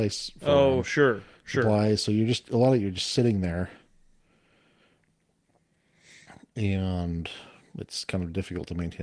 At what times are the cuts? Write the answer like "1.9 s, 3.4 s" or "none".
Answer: none